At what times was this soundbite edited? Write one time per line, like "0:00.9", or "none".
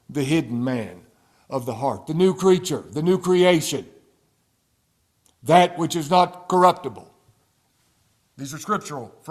none